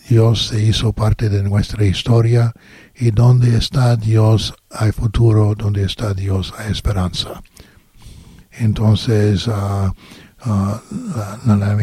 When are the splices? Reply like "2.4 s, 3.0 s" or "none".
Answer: 8.4 s